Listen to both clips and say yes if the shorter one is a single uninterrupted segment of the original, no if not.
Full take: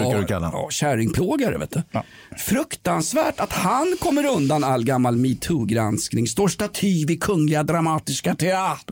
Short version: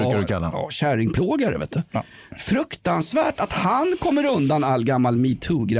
yes